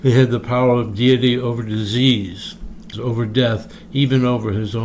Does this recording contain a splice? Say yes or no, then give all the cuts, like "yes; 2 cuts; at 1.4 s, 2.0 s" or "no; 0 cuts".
yes; 1 cut; at 2.9 s